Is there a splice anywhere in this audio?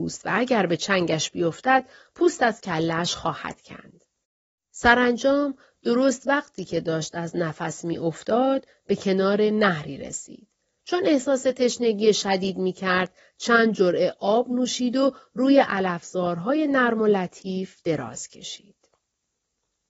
no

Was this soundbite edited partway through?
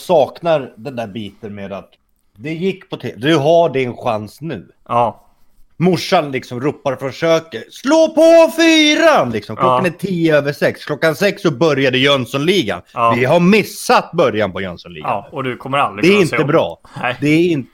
no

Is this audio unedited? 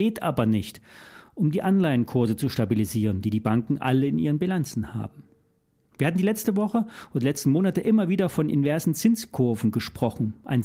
yes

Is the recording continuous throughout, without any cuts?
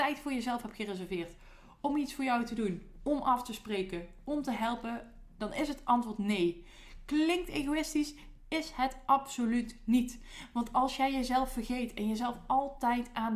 yes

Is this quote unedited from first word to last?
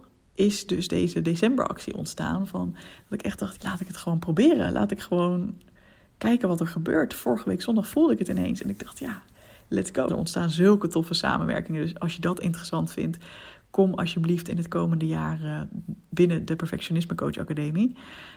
no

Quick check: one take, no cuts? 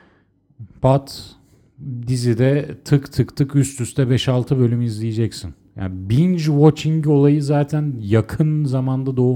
yes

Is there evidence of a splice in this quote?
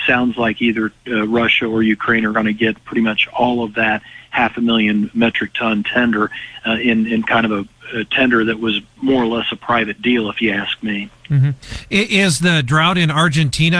no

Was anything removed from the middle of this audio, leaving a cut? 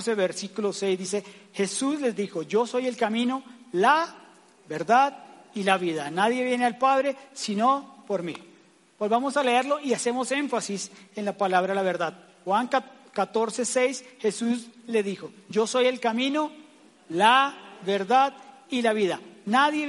no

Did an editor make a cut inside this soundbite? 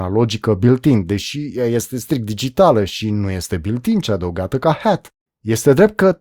yes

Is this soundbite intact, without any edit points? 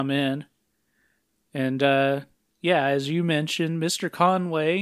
yes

